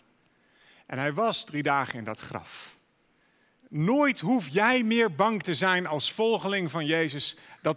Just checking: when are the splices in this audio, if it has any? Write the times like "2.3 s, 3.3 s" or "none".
3.6 s